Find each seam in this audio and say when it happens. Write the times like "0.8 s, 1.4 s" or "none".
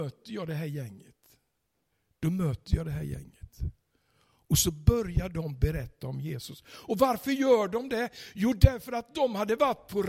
none